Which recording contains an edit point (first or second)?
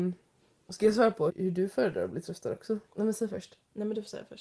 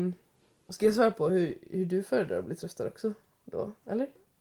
first